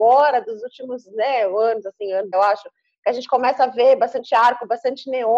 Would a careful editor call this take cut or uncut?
cut